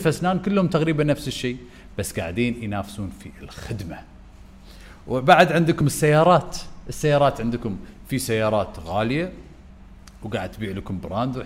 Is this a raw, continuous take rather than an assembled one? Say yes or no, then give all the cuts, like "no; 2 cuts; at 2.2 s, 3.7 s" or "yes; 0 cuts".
yes; 0 cuts